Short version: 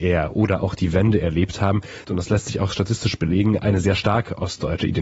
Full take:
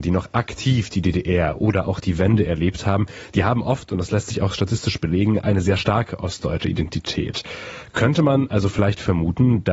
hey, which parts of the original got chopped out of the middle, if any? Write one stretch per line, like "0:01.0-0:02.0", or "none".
0:03.3-0:03.9